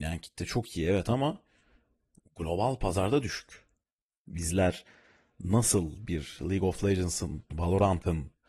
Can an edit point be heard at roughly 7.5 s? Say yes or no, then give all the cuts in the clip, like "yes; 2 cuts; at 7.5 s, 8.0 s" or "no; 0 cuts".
yes; 1 cut; at 7.5 s